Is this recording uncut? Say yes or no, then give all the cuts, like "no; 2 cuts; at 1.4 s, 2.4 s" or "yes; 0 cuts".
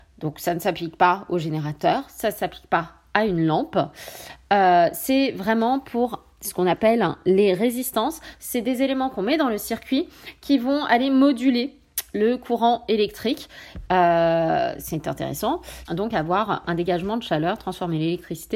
no; 2 cuts; at 13.9 s, 15.8 s